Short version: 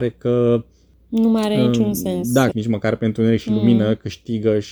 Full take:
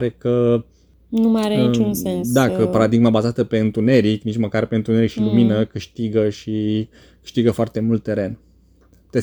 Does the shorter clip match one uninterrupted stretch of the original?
no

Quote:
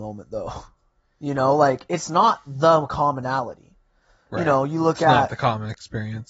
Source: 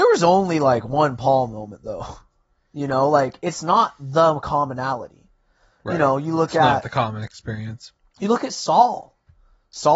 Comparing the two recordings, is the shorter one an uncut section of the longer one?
yes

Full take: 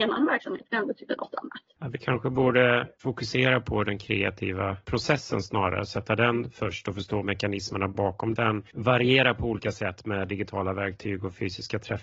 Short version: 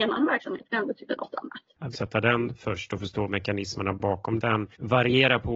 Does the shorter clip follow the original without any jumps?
no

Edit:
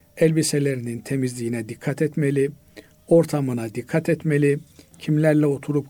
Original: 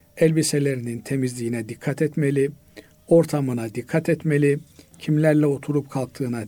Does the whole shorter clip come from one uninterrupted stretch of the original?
yes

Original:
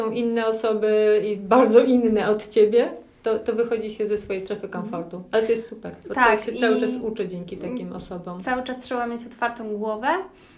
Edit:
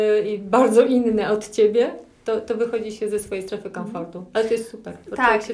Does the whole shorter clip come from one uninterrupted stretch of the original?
yes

